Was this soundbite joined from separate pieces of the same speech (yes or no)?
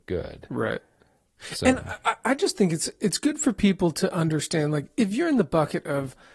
no